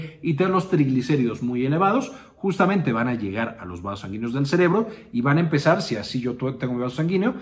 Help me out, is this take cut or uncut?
uncut